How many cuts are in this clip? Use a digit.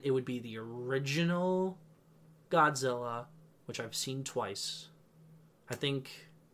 0